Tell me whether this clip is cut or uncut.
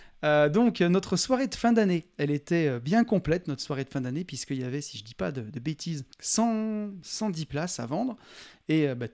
cut